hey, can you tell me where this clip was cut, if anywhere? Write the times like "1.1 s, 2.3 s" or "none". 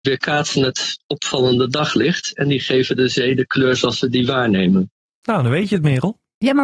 none